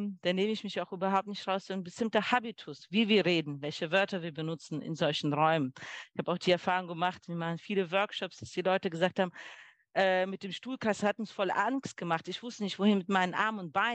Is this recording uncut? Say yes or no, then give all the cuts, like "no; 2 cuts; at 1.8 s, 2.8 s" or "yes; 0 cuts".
yes; 0 cuts